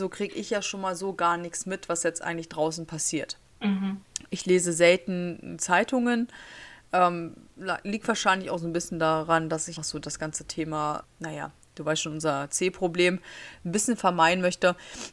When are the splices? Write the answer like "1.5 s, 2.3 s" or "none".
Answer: 9.8 s, 11.0 s